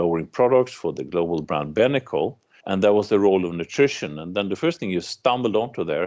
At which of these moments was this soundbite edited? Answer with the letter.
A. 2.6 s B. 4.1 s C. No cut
A